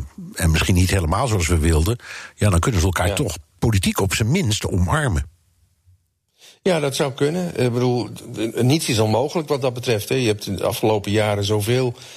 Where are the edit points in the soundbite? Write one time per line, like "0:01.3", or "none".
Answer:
none